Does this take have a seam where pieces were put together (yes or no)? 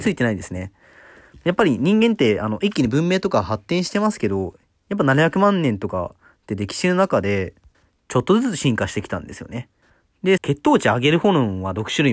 yes